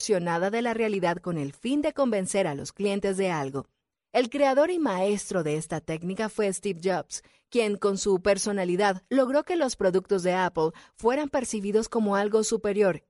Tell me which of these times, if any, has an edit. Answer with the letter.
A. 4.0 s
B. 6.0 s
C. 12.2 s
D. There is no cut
D